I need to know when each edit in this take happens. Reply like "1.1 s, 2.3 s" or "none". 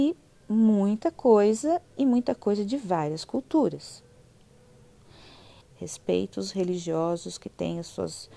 5.6 s